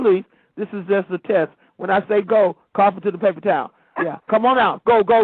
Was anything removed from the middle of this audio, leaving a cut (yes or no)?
yes